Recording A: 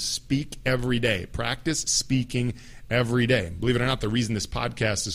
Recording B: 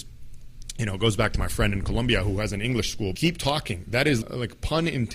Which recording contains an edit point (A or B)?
B